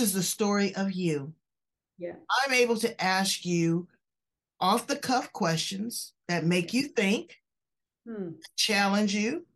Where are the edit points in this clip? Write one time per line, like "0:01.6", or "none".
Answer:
none